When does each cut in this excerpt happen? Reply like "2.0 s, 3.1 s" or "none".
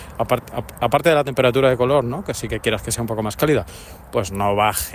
none